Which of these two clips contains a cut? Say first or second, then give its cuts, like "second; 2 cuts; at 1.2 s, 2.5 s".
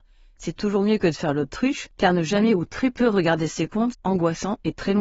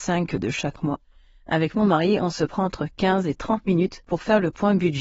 first; 1 cut; at 3.9 s